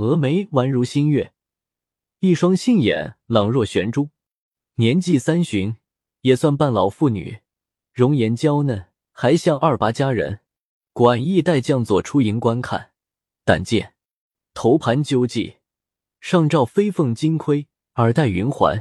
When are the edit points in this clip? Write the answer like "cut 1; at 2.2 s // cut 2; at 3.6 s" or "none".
cut 1; at 10.9 s

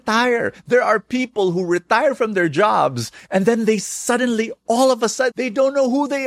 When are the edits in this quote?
cut 1; at 5.3 s

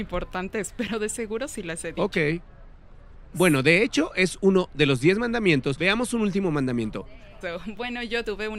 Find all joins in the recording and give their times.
cut 1; at 3.3 s // cut 2; at 7.4 s

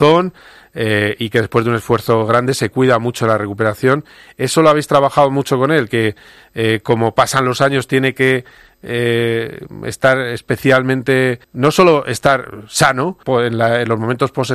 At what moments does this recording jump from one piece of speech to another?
cut 1; at 11.4 s // cut 2; at 13.2 s

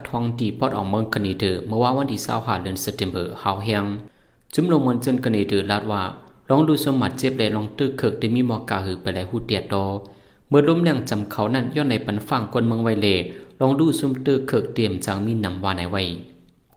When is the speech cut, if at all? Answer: none

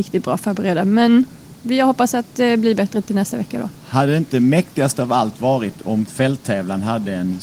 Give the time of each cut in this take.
none

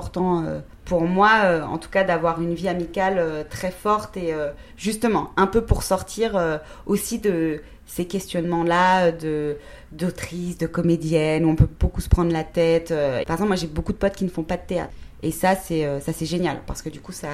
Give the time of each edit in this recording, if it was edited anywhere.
cut 1; at 13.2 s

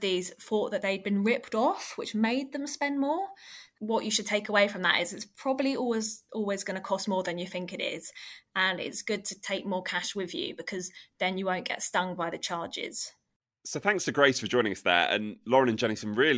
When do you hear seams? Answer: none

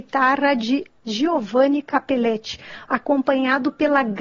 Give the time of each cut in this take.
cut 1; at 2.9 s

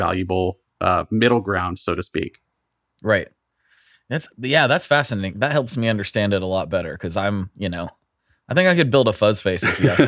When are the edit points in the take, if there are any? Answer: none

